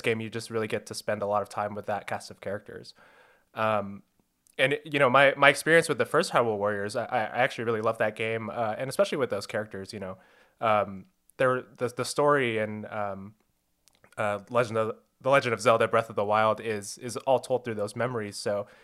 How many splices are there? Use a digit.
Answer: 1